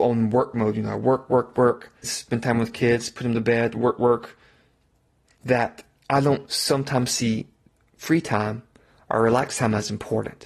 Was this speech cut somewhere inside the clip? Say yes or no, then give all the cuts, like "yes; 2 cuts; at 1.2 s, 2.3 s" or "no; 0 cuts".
yes; 2 cuts; at 2.0 s, 4.0 s